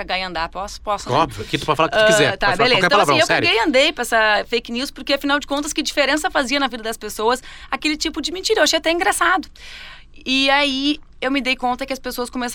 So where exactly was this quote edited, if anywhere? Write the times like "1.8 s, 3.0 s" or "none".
none

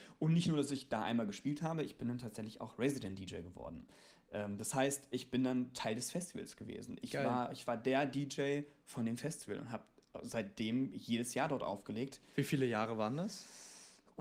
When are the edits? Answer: none

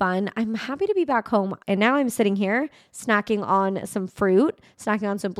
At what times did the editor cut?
1.6 s

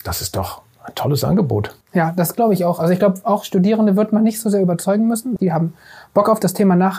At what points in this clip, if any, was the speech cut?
1.8 s, 5.4 s

